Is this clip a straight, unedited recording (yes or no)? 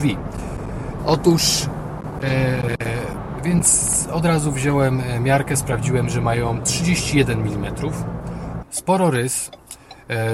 no